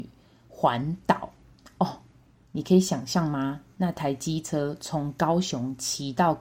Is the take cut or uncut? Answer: uncut